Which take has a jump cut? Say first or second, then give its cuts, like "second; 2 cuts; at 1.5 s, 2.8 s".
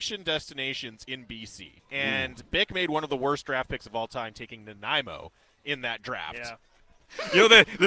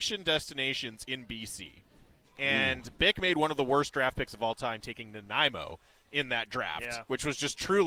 first; 2 cuts; at 1.8 s, 6.6 s